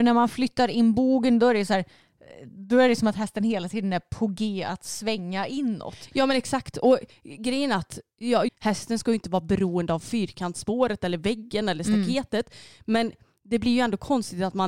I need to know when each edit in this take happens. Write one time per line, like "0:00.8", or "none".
0:08.5